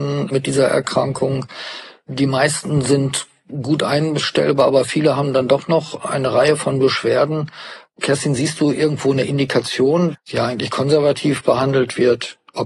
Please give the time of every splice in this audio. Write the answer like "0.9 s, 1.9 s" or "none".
10.1 s